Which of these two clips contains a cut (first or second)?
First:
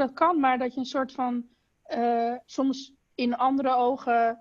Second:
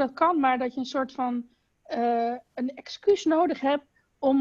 first